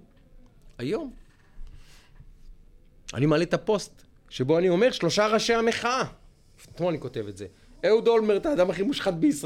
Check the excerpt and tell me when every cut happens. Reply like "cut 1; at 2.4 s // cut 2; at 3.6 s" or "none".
none